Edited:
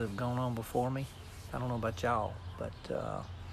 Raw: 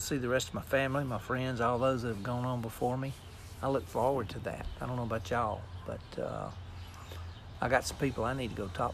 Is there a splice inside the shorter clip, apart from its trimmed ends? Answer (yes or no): yes